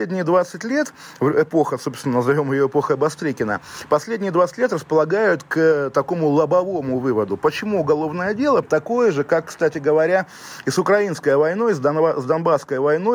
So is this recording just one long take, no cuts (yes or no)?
no